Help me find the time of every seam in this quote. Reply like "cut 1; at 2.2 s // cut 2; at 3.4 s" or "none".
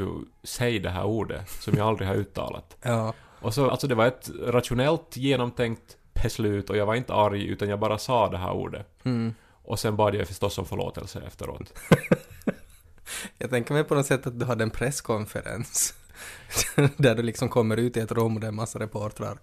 cut 1; at 3.7 s